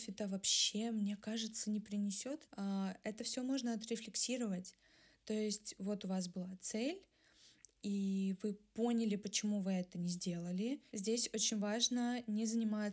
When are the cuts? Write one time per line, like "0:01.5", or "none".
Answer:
0:02.4
0:10.9